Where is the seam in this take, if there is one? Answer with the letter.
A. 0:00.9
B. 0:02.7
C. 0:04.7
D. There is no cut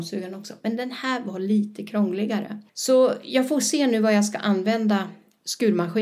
B